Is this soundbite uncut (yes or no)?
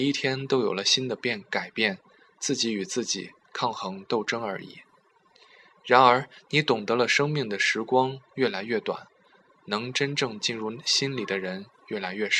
yes